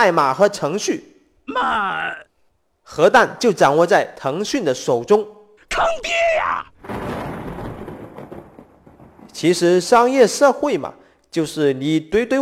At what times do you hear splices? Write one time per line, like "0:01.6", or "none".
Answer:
0:05.6